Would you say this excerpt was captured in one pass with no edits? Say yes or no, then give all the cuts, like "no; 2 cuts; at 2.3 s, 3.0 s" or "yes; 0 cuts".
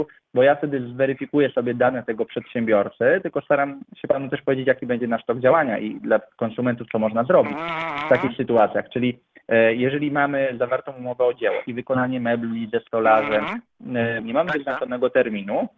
no; 2 cuts; at 11.7 s, 14.2 s